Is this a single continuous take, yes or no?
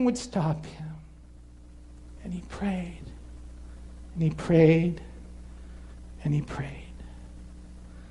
yes